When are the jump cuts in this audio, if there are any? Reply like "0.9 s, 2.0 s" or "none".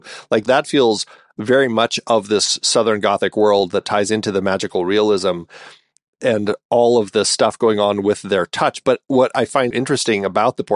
9.7 s